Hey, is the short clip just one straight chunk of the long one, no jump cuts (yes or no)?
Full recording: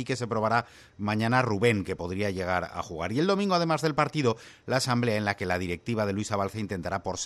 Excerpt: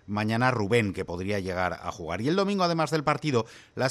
yes